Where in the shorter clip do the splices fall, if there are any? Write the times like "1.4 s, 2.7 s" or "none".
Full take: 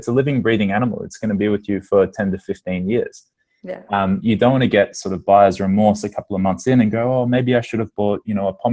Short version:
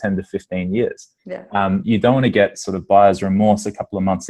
1.2 s